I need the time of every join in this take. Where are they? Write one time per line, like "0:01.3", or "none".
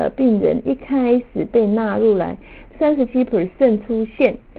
0:02.7